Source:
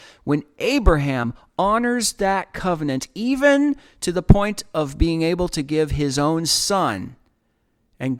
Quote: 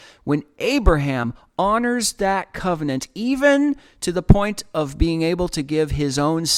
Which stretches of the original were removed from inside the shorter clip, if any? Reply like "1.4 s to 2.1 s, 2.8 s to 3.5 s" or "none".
none